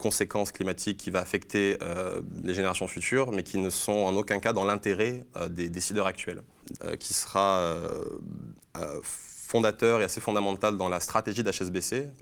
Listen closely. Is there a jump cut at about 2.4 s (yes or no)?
no